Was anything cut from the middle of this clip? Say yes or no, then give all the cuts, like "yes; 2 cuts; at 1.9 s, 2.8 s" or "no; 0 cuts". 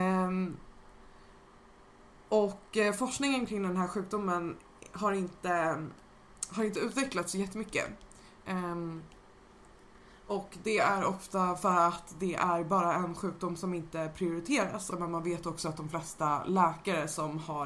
yes; 1 cut; at 14.9 s